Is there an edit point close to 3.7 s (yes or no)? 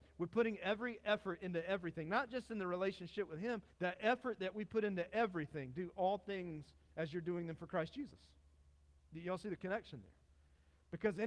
yes